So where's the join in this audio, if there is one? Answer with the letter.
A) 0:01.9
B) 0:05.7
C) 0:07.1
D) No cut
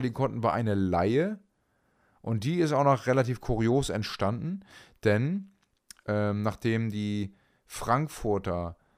D